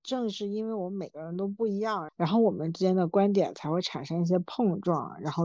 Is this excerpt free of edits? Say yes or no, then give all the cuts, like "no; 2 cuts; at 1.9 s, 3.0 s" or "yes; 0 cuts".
no; 1 cut; at 2.1 s